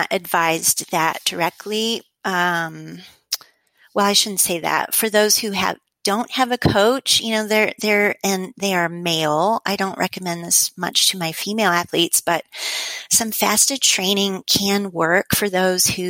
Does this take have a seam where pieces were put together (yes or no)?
no